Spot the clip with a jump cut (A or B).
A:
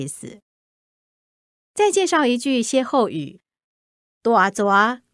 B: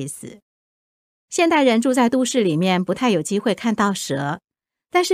B